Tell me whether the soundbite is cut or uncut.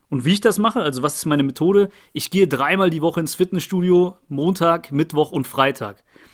uncut